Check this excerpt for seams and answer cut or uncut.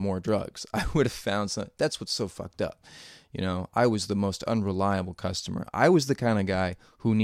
uncut